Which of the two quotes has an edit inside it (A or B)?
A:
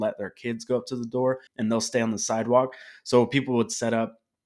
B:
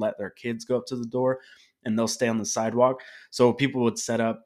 A